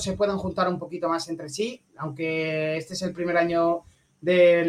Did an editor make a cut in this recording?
yes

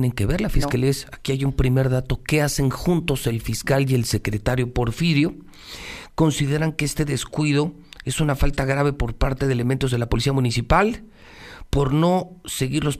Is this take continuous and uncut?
yes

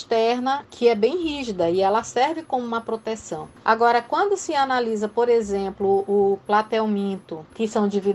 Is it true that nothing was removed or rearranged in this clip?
yes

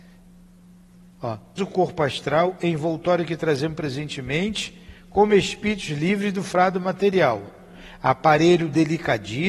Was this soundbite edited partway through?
yes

